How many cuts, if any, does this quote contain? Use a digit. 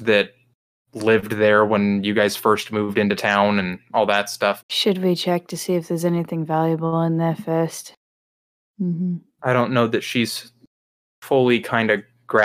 2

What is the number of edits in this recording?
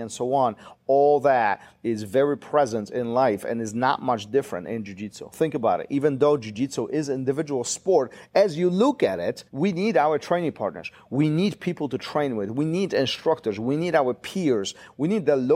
1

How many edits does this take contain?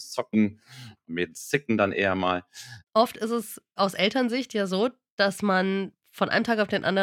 1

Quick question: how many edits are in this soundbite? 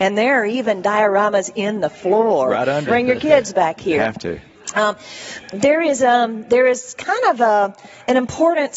1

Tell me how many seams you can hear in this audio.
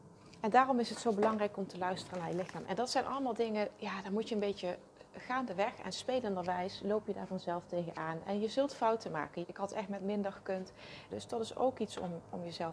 3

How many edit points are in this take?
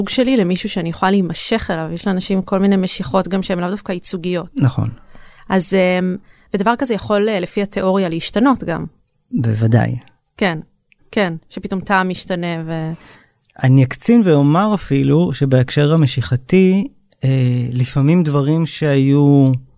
1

